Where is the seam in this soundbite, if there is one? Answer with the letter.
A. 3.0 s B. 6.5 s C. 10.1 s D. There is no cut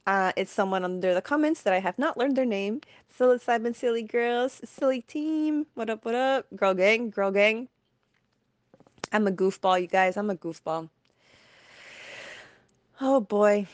A